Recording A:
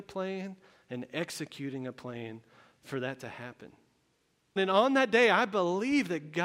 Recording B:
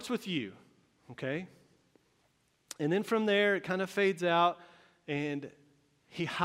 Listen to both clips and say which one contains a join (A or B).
A